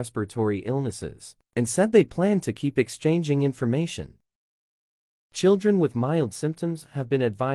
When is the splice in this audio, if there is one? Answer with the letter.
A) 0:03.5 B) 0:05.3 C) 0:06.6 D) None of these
B